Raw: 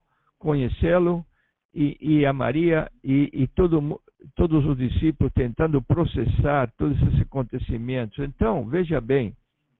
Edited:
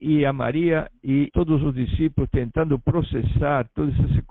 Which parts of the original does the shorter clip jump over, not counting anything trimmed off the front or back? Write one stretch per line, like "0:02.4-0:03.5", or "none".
0:03.3-0:04.3